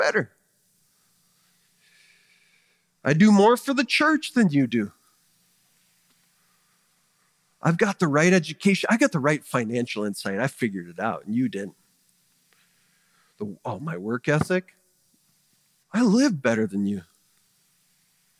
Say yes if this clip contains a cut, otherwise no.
yes